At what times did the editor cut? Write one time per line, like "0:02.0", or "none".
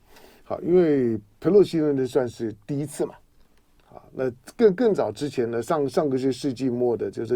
none